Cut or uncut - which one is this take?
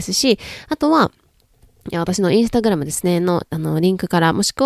uncut